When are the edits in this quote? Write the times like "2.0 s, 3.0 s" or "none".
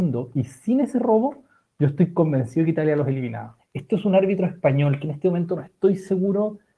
3.6 s